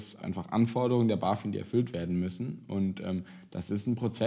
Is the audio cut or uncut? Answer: uncut